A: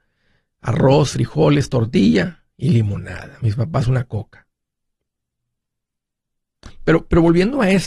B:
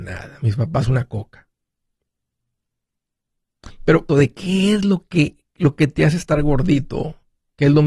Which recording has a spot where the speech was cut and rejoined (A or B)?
B